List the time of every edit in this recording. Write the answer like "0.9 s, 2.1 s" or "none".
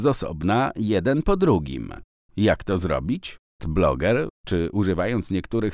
2.3 s, 3.6 s